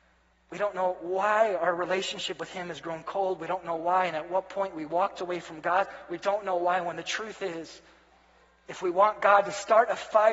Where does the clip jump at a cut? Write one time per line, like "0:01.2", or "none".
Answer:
none